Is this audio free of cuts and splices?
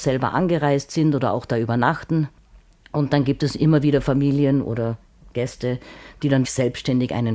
no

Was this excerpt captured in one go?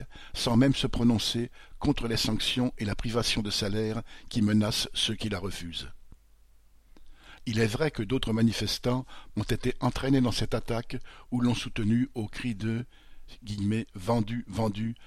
no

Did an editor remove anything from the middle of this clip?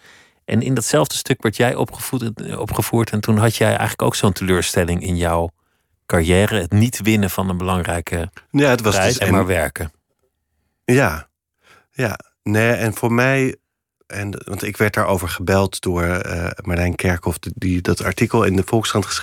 yes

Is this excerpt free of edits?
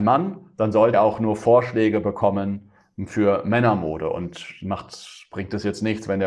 no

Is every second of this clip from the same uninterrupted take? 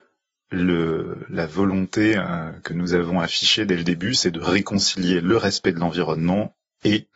yes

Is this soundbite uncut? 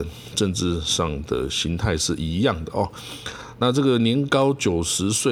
yes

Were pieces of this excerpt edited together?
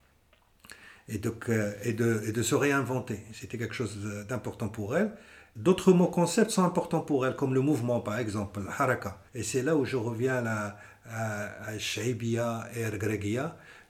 yes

